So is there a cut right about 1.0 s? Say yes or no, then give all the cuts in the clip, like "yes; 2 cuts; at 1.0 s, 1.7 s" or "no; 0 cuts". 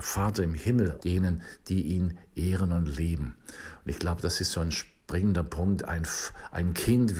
yes; 1 cut; at 1.0 s